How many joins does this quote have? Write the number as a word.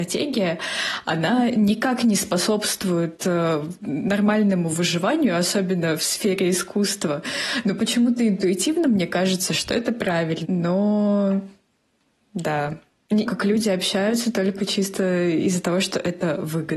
two